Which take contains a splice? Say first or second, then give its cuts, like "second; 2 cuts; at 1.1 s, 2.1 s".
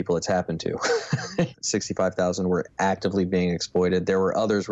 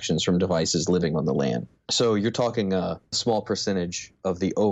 first; 1 cut; at 1.5 s